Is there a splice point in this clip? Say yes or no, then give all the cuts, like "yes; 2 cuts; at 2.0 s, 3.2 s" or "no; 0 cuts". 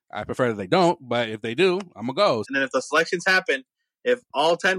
yes; 1 cut; at 2.4 s